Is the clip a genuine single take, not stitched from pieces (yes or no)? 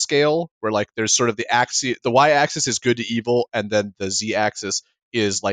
no